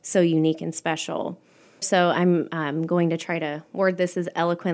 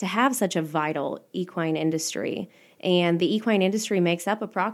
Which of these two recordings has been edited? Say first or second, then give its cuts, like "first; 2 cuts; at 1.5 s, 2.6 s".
first; 1 cut; at 1.8 s